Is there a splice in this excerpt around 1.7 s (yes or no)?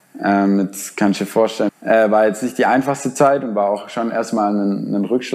yes